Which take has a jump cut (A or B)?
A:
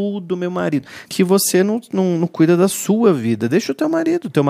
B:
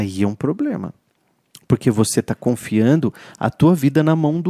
A